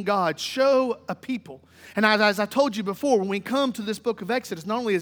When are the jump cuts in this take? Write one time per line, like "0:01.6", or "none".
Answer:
none